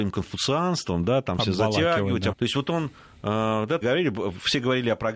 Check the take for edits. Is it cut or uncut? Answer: cut